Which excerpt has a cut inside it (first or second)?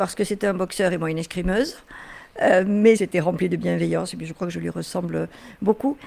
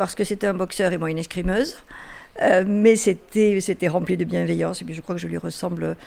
first